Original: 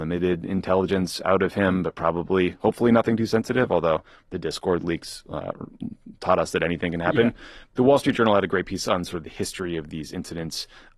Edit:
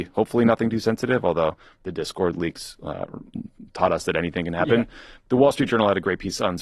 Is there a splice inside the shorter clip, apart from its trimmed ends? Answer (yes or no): no